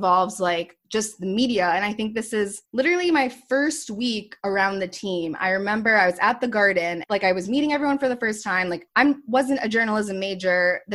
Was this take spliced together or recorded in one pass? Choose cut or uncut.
uncut